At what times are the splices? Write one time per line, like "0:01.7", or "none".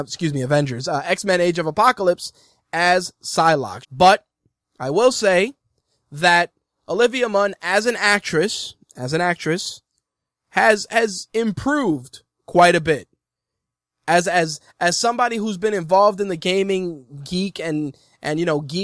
0:03.8